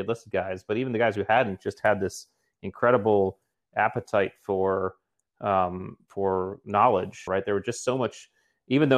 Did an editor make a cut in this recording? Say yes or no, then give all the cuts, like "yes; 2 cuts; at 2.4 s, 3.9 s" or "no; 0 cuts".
yes; 1 cut; at 7.3 s